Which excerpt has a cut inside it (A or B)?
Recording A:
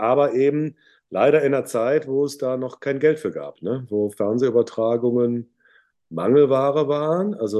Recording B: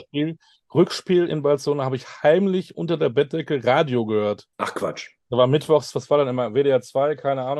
B